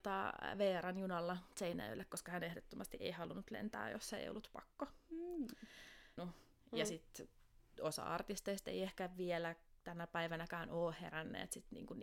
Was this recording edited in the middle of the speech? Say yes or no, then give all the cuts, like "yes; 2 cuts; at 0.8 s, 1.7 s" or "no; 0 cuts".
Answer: yes; 1 cut; at 6.2 s